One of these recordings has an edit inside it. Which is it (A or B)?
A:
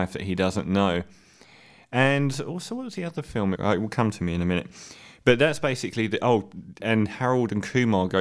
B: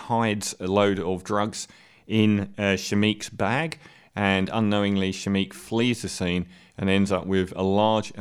A